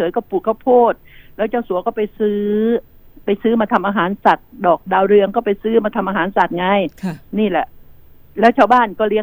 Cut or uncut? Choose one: cut